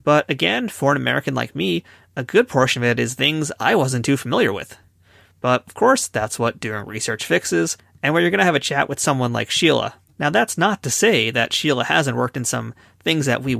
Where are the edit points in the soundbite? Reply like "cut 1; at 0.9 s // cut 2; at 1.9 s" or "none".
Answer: cut 1; at 10.1 s